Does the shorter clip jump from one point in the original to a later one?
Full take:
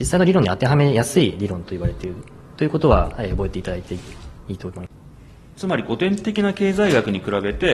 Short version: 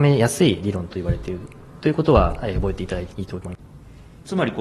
yes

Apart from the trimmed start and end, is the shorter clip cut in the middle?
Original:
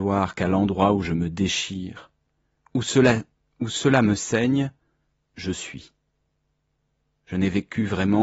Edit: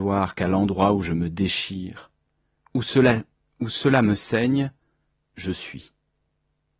no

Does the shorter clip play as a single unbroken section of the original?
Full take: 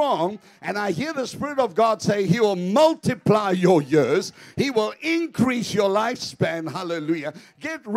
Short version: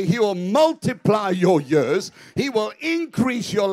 yes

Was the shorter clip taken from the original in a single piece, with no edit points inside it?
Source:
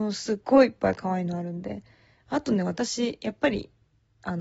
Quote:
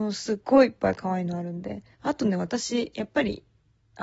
no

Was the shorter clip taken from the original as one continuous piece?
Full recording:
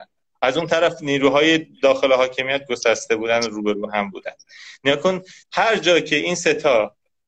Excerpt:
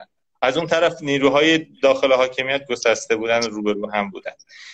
yes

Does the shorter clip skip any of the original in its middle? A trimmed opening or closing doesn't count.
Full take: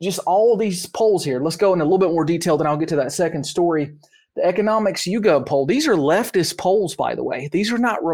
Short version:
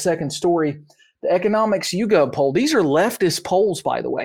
no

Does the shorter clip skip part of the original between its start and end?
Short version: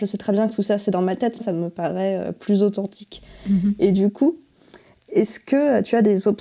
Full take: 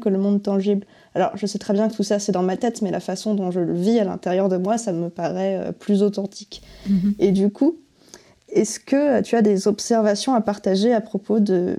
yes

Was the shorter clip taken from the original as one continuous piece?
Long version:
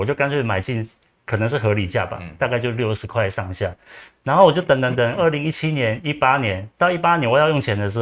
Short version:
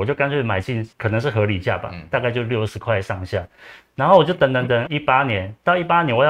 no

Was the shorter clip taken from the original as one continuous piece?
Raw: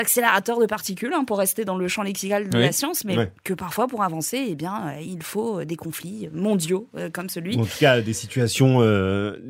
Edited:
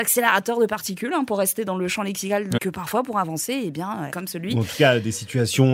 no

